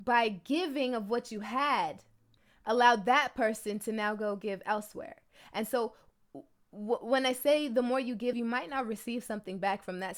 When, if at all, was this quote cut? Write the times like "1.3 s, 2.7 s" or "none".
8.3 s